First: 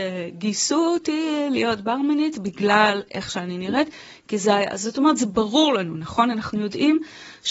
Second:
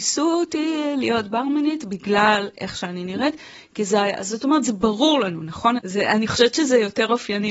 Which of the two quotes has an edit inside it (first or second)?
second